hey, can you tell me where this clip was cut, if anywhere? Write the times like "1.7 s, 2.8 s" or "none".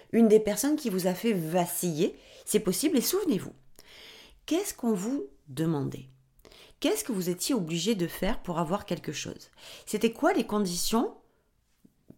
none